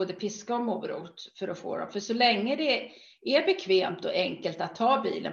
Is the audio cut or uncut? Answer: uncut